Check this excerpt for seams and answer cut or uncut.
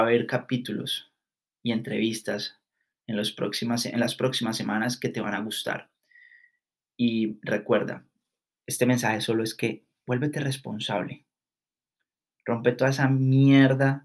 uncut